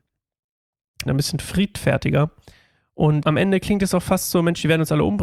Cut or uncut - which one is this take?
cut